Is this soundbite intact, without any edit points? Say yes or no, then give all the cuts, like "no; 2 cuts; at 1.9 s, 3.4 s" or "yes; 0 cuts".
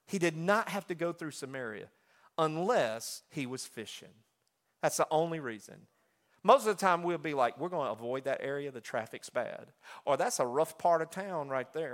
no; 1 cut; at 6.3 s